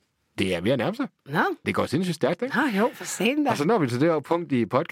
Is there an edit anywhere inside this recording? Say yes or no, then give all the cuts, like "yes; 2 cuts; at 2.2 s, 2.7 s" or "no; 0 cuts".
yes; 1 cut; at 1.6 s